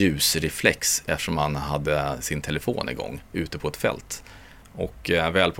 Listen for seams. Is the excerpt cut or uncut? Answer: cut